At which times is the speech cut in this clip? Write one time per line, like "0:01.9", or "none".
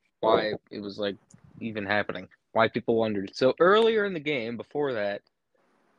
none